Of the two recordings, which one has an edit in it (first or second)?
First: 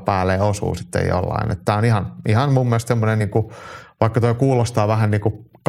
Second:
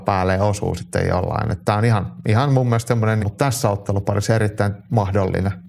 second